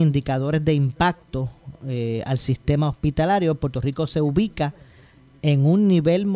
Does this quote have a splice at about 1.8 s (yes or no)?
no